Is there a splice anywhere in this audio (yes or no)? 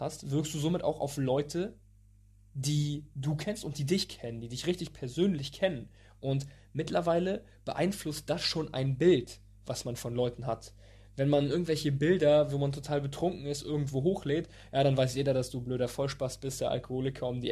no